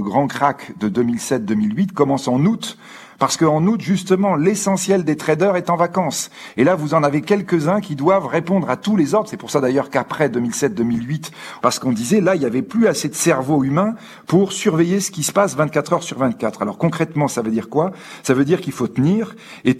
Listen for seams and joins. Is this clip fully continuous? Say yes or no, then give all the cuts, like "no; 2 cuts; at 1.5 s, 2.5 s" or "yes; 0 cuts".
no; 1 cut; at 11.6 s